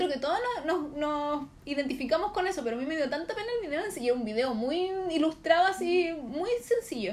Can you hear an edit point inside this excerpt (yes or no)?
no